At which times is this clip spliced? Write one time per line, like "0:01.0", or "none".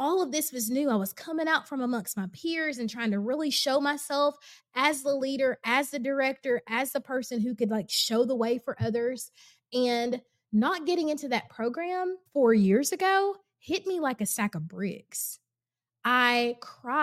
0:12.3